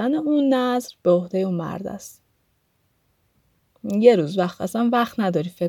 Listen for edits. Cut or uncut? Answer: uncut